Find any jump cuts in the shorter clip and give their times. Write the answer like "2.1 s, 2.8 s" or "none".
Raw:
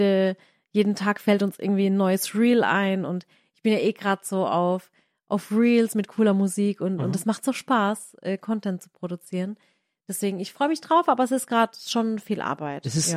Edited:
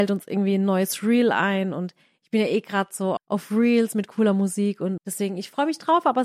3.2 s, 5.0 s